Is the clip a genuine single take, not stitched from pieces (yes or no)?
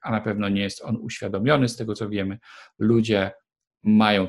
yes